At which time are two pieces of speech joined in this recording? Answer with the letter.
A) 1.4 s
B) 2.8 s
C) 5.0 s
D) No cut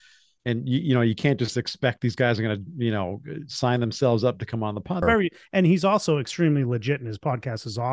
C